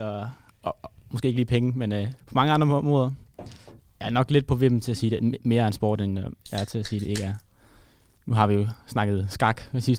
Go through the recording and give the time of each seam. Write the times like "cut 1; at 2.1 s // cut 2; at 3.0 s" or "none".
cut 1; at 2.2 s // cut 2; at 3.8 s